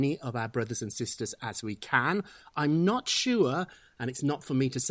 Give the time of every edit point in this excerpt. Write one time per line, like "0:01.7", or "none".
none